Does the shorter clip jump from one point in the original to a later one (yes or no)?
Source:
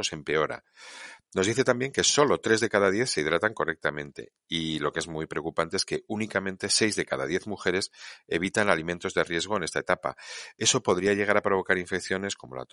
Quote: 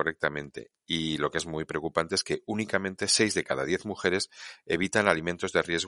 no